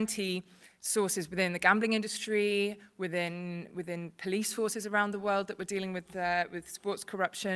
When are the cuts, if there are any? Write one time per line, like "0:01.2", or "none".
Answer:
none